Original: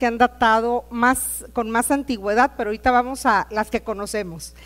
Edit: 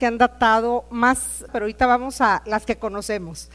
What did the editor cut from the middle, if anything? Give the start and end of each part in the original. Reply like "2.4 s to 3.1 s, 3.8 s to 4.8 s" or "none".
1.5 s to 2.5 s